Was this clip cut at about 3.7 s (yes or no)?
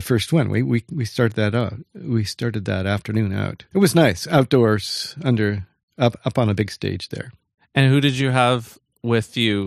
yes